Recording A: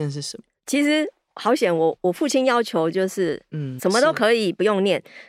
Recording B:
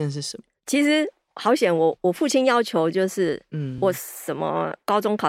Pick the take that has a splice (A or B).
A